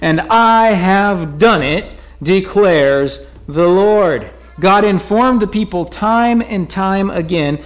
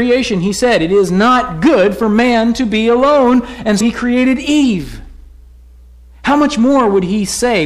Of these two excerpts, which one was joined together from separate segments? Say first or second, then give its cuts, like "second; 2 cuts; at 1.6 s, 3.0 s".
second; 1 cut; at 3.8 s